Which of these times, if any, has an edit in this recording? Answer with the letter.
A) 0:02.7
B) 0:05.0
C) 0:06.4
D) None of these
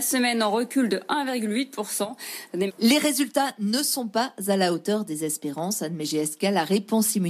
A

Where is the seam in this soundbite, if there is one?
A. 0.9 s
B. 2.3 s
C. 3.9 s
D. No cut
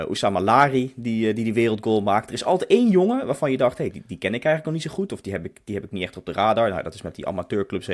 D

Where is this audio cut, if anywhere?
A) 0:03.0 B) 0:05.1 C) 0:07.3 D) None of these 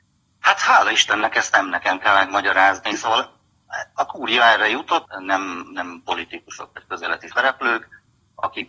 B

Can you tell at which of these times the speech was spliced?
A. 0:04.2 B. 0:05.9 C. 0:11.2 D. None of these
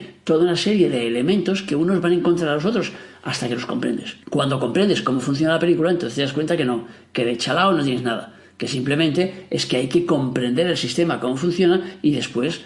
A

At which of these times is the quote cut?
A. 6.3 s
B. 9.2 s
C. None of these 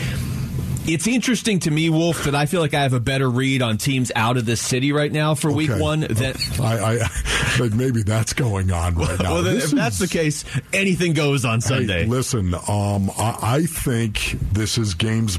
A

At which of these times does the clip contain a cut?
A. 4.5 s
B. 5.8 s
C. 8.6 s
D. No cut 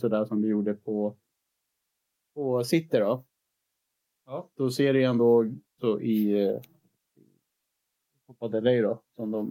B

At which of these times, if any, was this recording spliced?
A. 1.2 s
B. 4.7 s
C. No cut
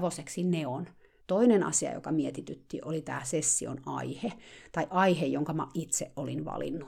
A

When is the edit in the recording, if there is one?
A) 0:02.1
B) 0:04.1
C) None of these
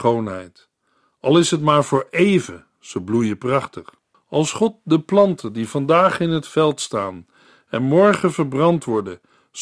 B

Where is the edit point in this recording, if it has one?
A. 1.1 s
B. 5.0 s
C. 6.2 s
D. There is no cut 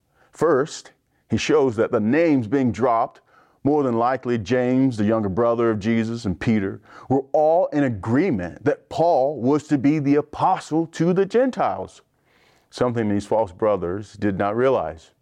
D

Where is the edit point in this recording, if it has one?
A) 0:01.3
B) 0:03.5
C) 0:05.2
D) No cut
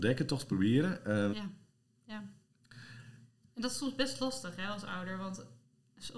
A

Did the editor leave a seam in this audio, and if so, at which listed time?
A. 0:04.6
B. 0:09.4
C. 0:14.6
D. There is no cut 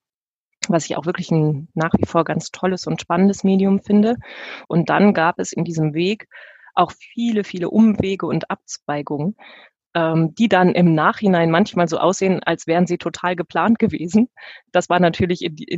A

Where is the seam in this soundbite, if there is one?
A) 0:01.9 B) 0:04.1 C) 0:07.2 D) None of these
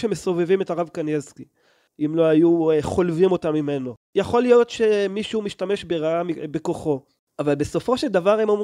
A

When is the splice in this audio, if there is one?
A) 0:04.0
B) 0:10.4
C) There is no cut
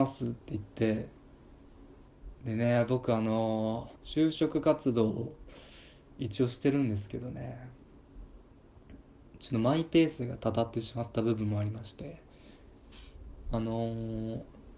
A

